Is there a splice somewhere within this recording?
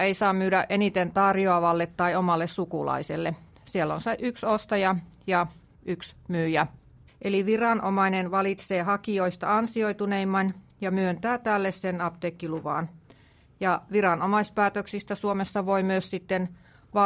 yes; 1 cut; at 7.1 s

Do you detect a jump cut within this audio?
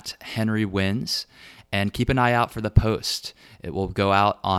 no; 0 cuts

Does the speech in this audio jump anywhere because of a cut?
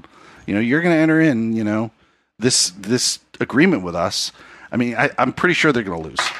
no; 0 cuts

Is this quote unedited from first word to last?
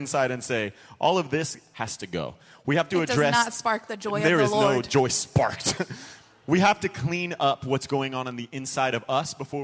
yes; 0 cuts

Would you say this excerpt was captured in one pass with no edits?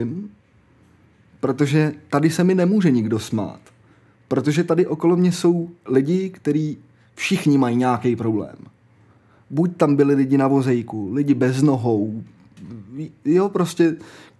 yes; 0 cuts

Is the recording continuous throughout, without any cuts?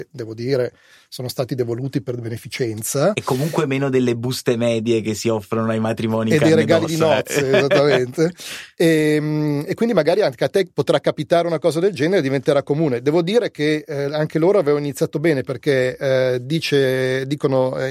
yes; 0 cuts

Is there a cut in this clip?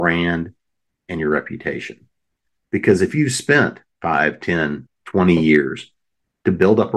yes; 1 cut; at 4.9 s

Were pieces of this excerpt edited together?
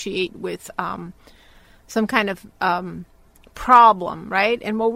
no; 0 cuts

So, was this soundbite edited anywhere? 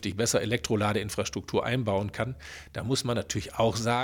no; 0 cuts

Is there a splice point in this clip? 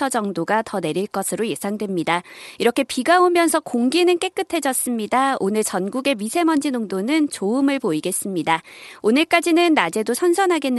no; 0 cuts

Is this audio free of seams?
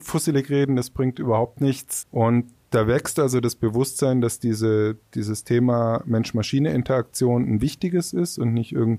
no; 1 cut; at 2.0 s

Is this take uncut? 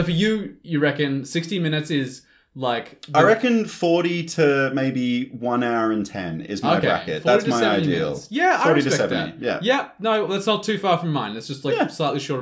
yes; 0 cuts

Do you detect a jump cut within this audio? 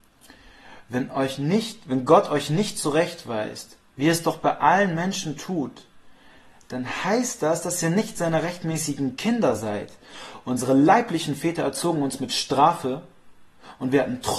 no; 0 cuts

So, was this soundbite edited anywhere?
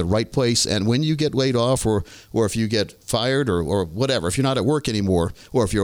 no; 0 cuts

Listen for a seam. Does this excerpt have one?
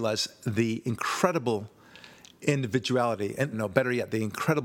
yes; 1 cut; at 3.5 s

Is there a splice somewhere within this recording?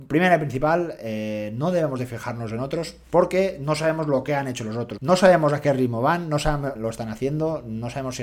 yes; 2 cuts; at 5.0 s, 6.8 s

